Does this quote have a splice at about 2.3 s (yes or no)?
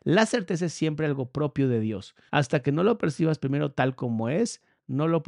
yes